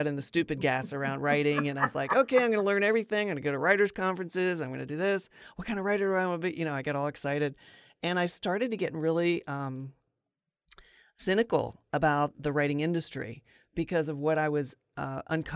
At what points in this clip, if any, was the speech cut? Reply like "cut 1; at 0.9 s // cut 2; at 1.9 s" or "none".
none